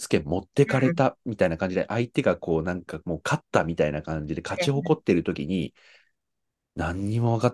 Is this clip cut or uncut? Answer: uncut